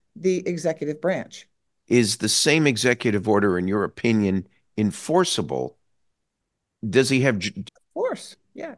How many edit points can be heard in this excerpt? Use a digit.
2